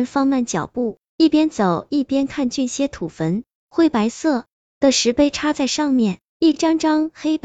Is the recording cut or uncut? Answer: uncut